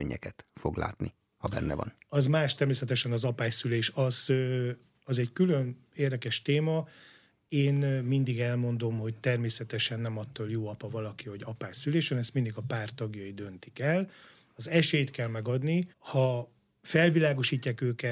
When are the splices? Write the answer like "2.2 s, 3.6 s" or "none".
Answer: 15.9 s